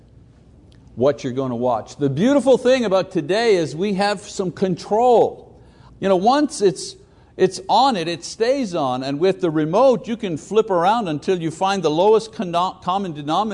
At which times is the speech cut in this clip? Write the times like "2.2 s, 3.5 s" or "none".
5.9 s